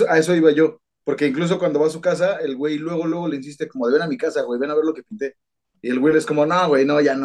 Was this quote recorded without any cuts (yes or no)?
yes